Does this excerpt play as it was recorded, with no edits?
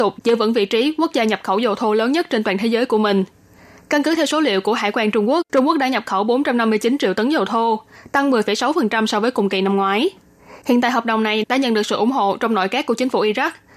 no; 1 cut; at 5.5 s

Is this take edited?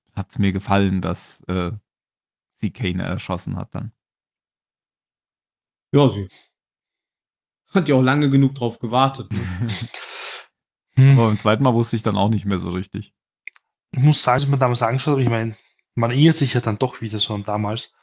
yes; 1 cut; at 14.4 s

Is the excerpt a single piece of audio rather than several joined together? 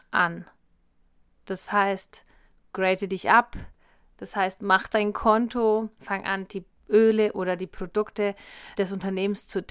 no; 2 cuts; at 6.0 s, 8.8 s

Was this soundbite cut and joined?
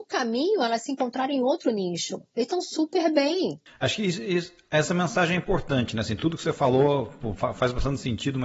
no; 0 cuts

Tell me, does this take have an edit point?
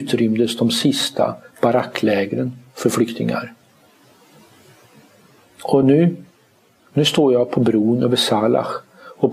no; 0 cuts

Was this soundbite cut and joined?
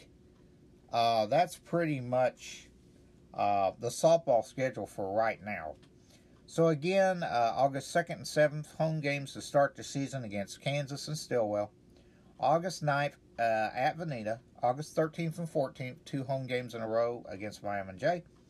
no; 0 cuts

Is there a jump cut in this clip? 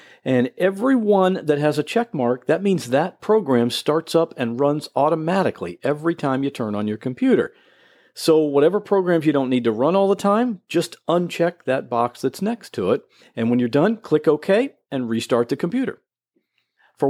no; 0 cuts

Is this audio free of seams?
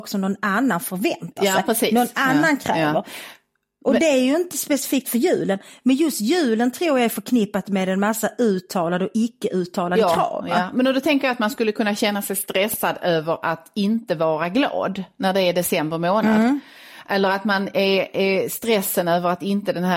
yes; 0 cuts

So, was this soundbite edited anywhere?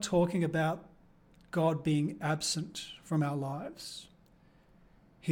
no; 0 cuts

